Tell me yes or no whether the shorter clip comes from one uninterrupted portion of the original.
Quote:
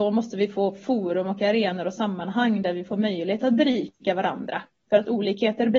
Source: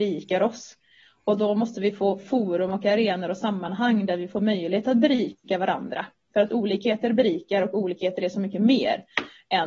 yes